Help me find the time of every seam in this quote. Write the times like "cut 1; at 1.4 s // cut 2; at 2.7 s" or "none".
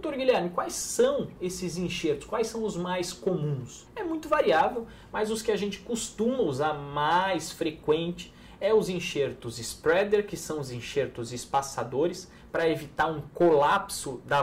none